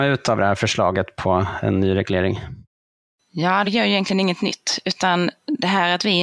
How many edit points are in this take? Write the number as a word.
one